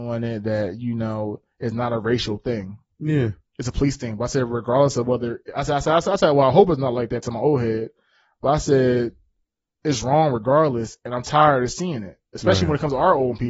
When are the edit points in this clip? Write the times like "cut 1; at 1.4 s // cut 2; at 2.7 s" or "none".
none